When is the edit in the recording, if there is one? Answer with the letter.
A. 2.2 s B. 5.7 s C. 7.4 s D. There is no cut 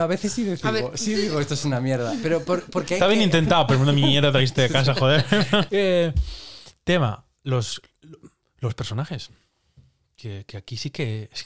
B